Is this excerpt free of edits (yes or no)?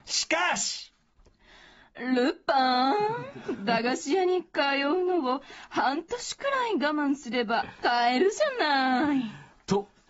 yes